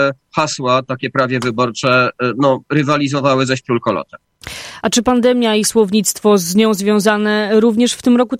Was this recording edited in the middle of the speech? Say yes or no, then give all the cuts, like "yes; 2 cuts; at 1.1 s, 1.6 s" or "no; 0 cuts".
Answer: no; 0 cuts